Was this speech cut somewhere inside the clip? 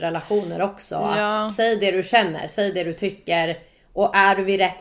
no; 0 cuts

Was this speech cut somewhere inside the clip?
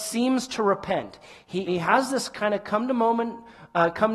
yes; 1 cut; at 1.7 s

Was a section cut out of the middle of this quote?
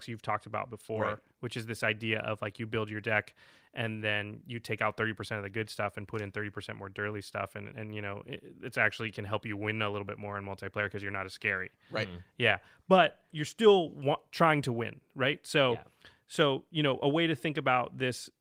yes; 1 cut; at 13.3 s

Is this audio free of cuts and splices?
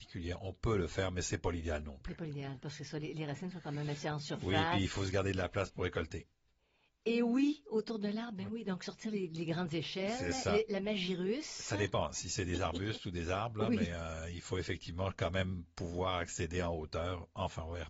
yes; 0 cuts

